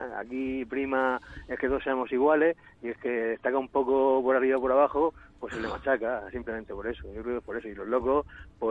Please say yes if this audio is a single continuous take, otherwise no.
yes